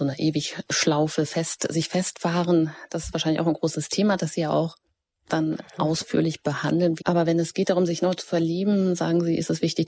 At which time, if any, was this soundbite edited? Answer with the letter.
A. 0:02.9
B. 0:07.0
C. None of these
B